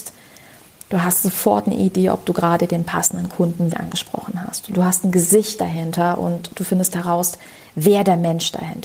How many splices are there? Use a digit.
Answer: 1